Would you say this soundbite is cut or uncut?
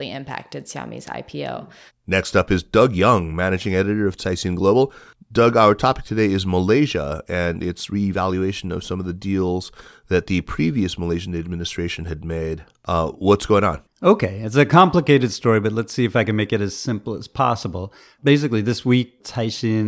cut